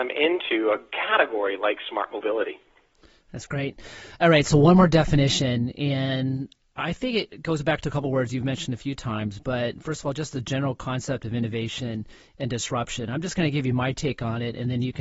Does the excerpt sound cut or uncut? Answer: uncut